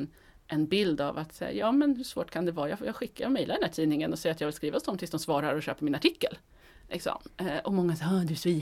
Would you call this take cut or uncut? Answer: uncut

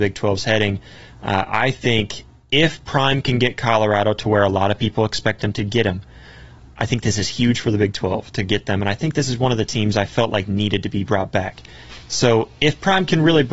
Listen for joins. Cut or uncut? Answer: uncut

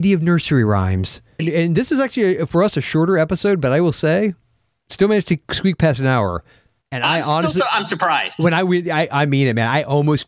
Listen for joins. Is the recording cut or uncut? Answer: cut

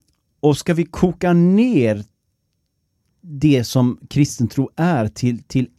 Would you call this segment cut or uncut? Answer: uncut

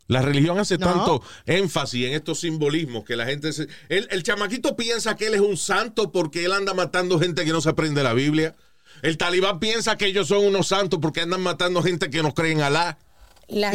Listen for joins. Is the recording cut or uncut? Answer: uncut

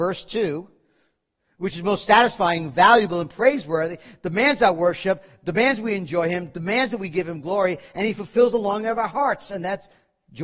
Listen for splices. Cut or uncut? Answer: uncut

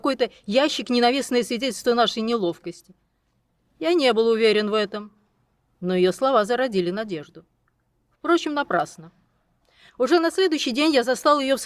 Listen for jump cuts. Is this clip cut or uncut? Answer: uncut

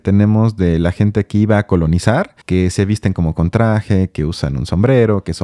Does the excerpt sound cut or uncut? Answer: cut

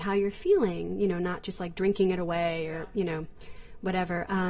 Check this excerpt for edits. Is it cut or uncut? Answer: uncut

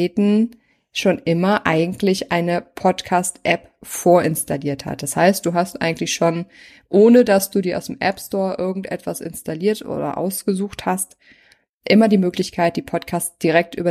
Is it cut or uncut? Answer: uncut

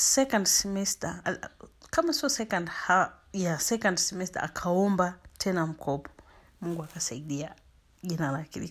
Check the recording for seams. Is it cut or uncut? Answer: cut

